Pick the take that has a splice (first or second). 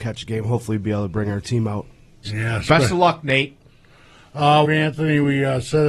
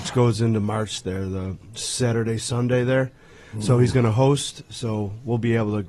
first